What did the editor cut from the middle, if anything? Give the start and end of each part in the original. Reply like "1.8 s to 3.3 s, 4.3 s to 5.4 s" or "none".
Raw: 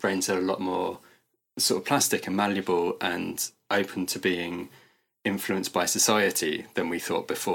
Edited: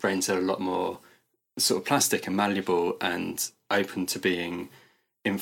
none